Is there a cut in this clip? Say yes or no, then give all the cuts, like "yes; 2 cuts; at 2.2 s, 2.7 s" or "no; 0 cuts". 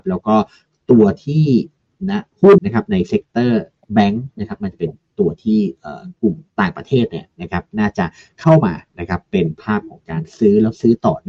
yes; 2 cuts; at 2.6 s, 6.5 s